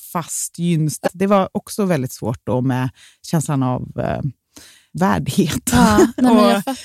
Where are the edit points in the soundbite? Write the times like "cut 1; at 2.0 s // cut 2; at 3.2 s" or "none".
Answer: cut 1; at 1.1 s